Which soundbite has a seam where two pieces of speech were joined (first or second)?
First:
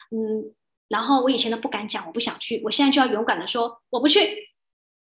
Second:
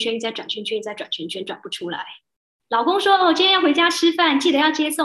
second